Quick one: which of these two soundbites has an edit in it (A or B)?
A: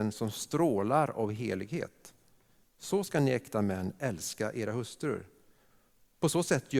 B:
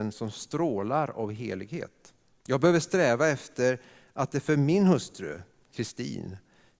B